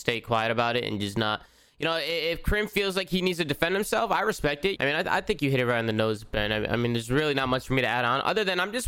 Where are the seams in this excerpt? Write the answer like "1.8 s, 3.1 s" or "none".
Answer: 4.8 s